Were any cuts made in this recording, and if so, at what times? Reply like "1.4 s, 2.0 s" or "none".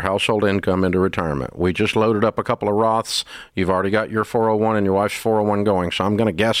none